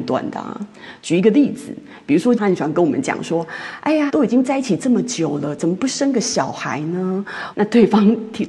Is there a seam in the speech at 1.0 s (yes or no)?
no